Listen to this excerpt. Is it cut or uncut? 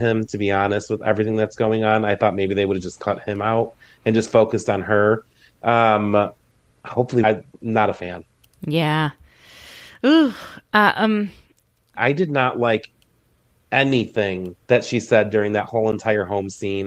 cut